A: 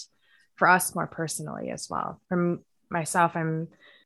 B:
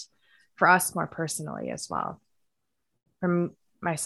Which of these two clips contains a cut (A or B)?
A